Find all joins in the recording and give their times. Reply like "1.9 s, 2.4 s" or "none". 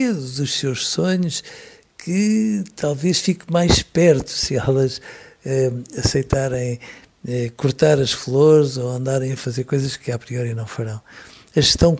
none